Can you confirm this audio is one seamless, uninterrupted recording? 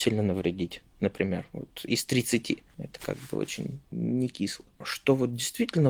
yes; 0 cuts

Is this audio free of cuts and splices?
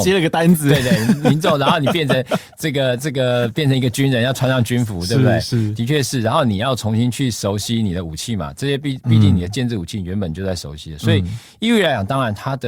yes; 0 cuts

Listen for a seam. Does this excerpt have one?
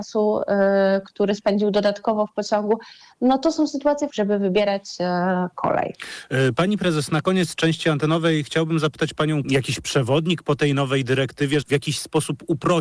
yes; 3 cuts; at 4.1 s, 9.4 s, 11.6 s

